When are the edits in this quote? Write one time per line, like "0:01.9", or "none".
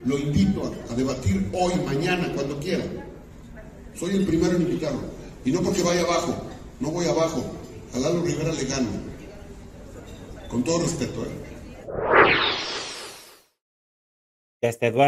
none